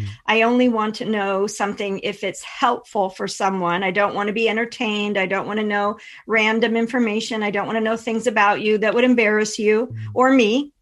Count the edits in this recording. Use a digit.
0